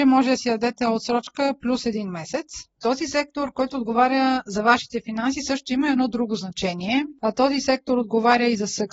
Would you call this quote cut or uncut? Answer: uncut